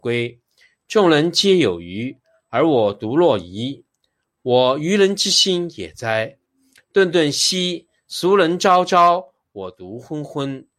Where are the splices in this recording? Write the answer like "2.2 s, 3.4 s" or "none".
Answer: none